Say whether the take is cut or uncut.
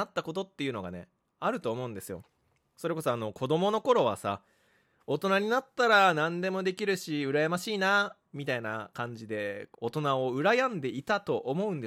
cut